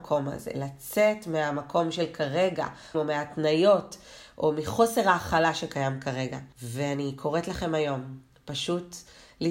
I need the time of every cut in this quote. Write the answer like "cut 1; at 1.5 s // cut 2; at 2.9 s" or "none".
cut 1; at 2.9 s // cut 2; at 6.5 s